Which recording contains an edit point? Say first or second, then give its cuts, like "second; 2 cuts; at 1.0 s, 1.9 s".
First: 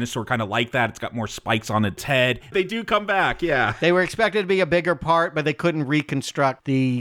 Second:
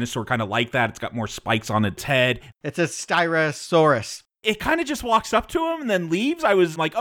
first; 1 cut; at 2.5 s